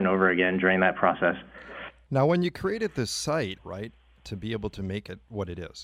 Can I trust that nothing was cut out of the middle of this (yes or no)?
no